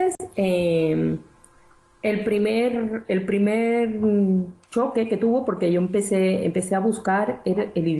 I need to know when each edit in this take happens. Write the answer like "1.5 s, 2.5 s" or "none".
4.6 s